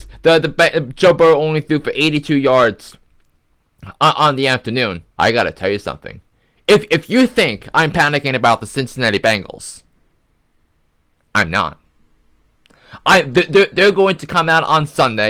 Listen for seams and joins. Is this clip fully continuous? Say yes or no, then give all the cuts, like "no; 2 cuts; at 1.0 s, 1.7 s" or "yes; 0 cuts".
no; 1 cut; at 5.1 s